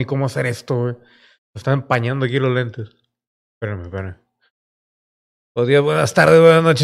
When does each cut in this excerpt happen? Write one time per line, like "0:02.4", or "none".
none